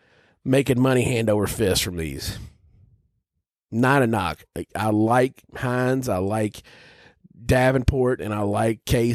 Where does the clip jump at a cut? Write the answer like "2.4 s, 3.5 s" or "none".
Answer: 8.2 s